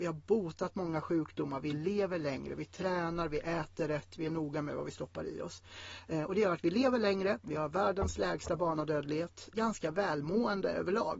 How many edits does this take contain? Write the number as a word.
one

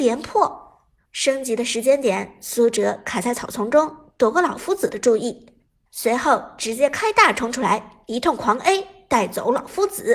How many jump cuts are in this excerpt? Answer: one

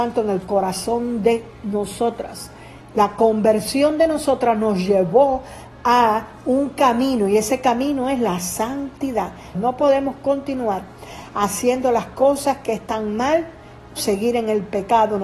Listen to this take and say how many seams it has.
two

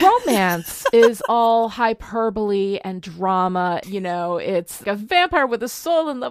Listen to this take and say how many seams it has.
two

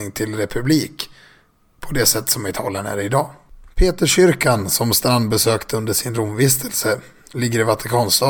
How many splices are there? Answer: zero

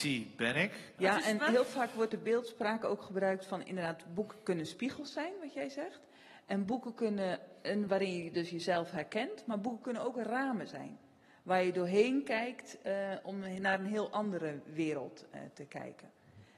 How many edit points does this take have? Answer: one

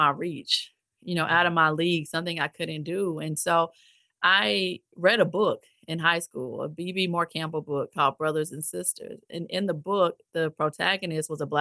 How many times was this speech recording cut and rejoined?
zero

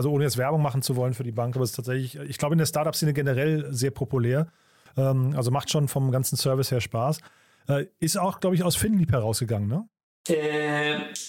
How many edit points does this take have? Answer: zero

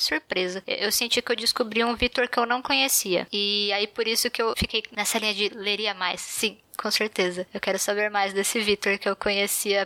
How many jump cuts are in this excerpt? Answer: zero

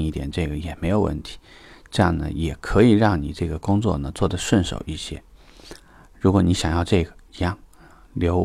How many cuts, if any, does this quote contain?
zero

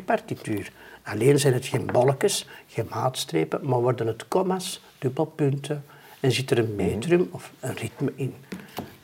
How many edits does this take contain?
one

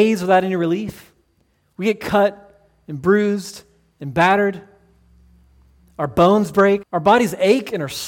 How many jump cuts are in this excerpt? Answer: one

